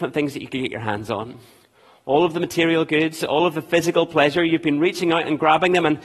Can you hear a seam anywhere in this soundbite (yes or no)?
no